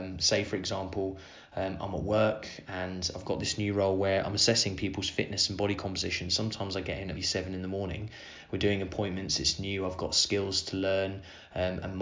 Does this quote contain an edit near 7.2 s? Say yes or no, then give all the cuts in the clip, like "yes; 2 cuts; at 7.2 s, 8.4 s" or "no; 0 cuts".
yes; 1 cut; at 7.2 s